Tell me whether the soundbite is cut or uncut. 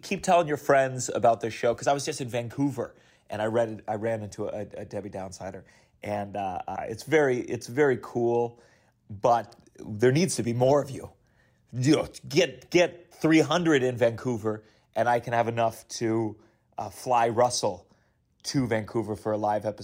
uncut